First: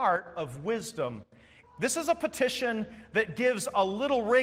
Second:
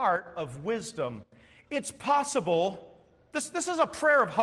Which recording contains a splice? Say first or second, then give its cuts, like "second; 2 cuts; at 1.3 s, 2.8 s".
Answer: first; 1 cut; at 1.6 s